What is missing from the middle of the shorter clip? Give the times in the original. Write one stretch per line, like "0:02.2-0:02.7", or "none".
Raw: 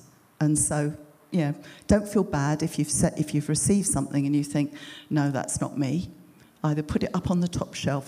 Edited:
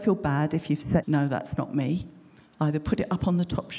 0:03.1-0:05.1